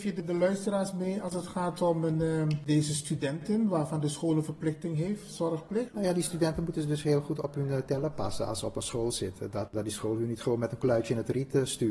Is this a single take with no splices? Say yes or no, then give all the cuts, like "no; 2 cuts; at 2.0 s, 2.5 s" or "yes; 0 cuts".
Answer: yes; 0 cuts